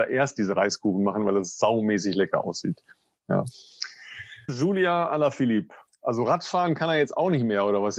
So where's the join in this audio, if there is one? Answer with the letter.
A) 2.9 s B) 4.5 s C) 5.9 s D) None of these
B